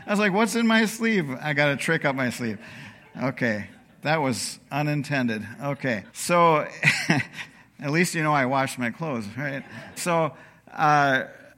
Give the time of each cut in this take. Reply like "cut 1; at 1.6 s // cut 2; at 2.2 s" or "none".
cut 1; at 6.1 s // cut 2; at 10.0 s